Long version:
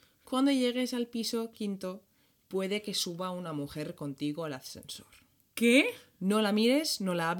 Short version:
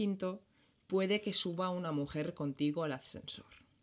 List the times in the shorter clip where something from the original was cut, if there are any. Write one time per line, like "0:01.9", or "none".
none